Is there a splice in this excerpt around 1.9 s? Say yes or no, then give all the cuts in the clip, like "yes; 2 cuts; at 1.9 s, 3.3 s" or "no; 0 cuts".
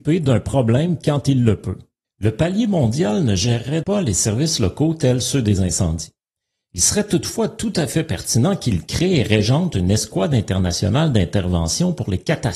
no; 1 cut; at 3.8 s